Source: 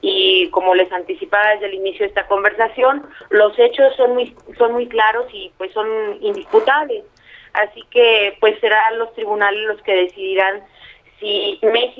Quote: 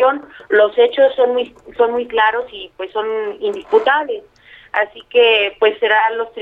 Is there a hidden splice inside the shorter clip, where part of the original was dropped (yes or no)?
no